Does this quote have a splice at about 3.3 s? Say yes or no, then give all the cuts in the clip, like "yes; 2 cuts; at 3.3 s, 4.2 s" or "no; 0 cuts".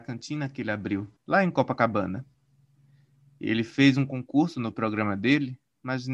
no; 1 cut; at 1.2 s